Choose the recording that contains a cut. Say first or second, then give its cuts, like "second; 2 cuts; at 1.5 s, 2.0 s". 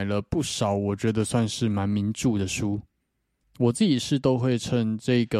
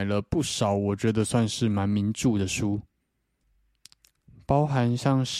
first; 1 cut; at 3.5 s